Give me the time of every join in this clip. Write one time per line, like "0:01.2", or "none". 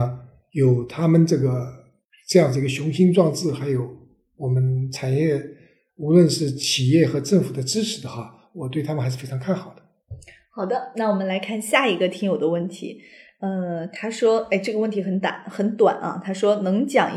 none